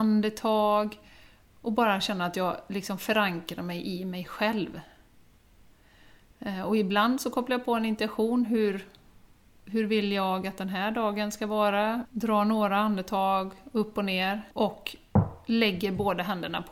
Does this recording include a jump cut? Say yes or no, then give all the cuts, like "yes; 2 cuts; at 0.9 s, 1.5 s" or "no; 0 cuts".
yes; 2 cuts; at 12.0 s, 14.5 s